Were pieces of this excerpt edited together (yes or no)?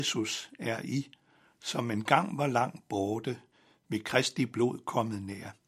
no